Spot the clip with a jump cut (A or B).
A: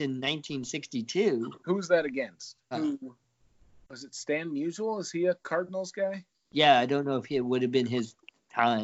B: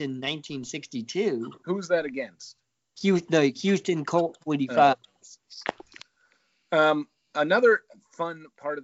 A